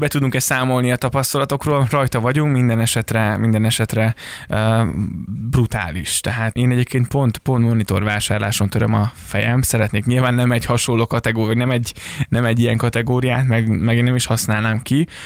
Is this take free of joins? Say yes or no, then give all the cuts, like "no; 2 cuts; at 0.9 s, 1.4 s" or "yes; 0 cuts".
no; 1 cut; at 6.6 s